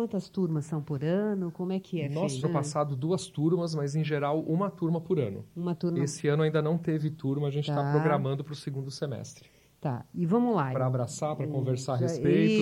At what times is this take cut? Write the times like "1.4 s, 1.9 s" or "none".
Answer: 2.4 s, 10.7 s